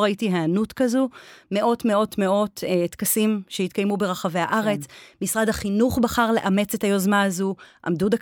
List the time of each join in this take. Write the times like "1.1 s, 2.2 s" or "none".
none

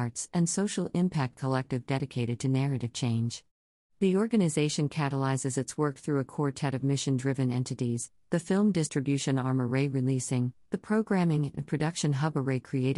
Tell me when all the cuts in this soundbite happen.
10.7 s

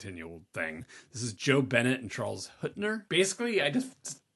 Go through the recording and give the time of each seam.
3.1 s

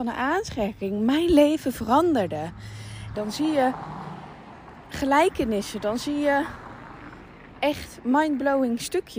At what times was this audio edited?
3.1 s

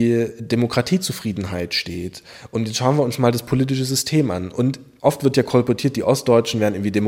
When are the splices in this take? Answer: none

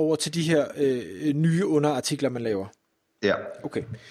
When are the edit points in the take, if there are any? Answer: none

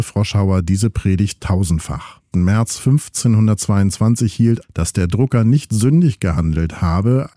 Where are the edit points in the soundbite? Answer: 2.3 s, 4.6 s

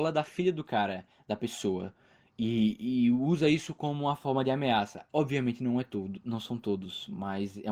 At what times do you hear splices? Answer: 5.1 s

